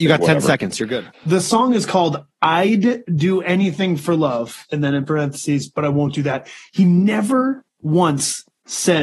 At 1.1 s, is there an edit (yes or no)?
yes